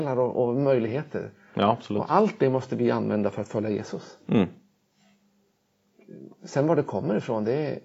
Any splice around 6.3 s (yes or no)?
no